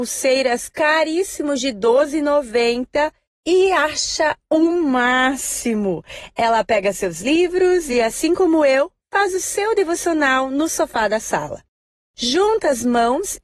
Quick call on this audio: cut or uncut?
uncut